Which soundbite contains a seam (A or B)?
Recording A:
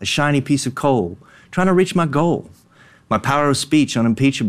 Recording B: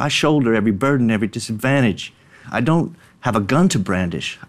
B